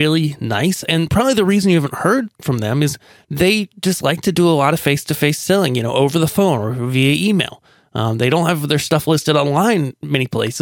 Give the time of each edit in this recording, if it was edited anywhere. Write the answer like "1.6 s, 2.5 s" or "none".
none